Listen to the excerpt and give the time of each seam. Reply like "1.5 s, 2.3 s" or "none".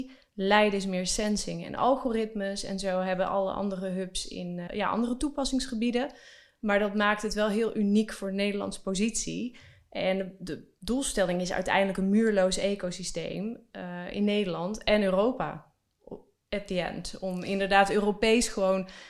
4.7 s

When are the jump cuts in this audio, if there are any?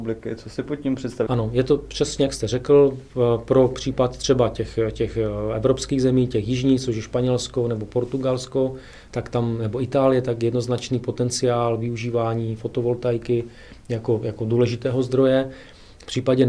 1.3 s

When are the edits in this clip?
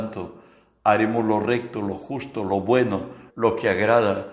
3.3 s

